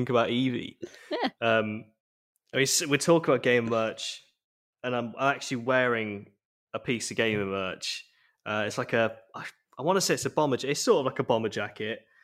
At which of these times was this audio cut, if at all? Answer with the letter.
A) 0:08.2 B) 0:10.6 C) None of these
C